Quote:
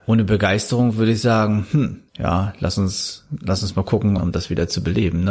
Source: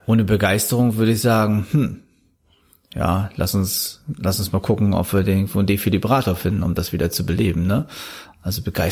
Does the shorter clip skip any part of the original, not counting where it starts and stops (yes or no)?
yes